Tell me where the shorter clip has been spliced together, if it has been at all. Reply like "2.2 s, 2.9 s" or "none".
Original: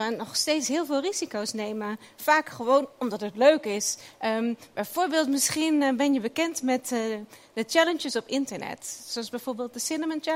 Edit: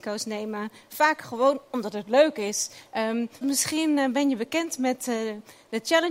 3.4 s